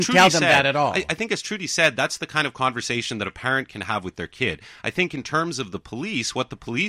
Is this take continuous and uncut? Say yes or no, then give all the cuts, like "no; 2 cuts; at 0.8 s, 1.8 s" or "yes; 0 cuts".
yes; 0 cuts